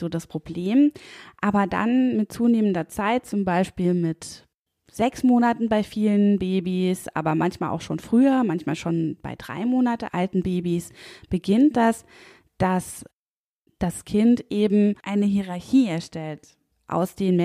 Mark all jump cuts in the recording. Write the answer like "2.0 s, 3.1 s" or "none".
none